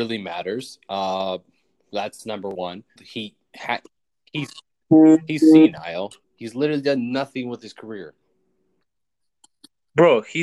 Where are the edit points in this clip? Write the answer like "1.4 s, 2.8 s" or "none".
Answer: 3.0 s, 6.2 s